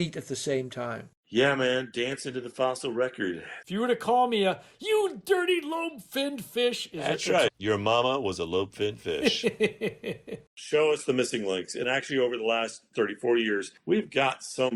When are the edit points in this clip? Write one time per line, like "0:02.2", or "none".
0:03.6
0:07.5
0:10.5